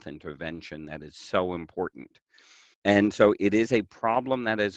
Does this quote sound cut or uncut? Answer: cut